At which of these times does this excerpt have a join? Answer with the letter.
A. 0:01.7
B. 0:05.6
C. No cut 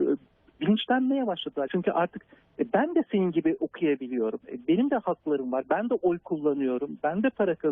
A